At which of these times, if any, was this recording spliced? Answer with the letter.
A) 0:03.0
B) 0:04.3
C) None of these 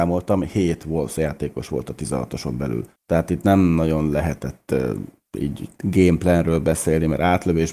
C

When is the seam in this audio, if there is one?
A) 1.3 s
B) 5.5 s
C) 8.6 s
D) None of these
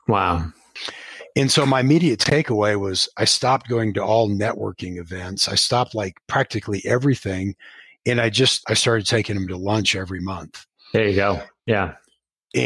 C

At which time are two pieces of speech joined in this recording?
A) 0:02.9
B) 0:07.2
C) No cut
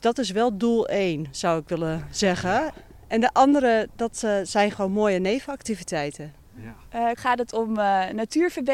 B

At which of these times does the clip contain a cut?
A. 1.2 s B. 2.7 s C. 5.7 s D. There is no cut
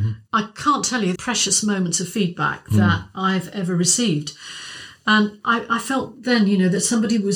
A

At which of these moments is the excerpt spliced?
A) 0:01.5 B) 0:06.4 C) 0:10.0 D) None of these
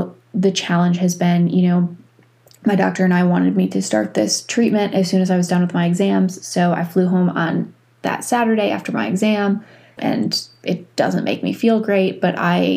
C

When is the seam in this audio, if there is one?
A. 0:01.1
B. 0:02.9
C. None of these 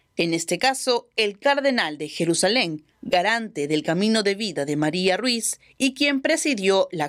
B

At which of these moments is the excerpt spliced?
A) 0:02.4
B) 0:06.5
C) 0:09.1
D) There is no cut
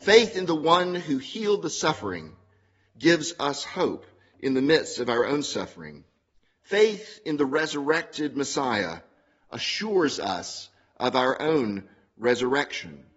D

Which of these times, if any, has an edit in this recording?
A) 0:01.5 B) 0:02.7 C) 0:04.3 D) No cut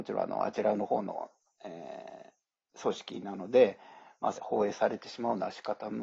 C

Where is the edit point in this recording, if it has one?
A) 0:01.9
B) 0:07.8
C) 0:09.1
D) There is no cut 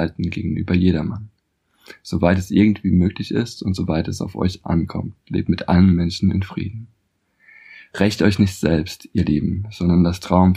D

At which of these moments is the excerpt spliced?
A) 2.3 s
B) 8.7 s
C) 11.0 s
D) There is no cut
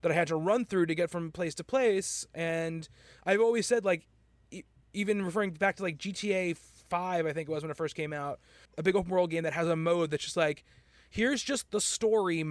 B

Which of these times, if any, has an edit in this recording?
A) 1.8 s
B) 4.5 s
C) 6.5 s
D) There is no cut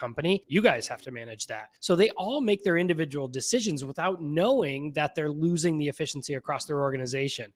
D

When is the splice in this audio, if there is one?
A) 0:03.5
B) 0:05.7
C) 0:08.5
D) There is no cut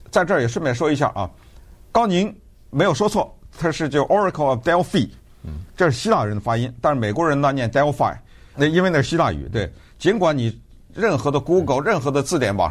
C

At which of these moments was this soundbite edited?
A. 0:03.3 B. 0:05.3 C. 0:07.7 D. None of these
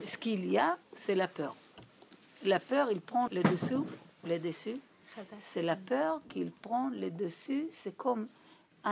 A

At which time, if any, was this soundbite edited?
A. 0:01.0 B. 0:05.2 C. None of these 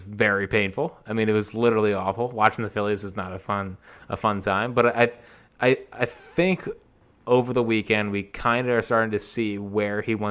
C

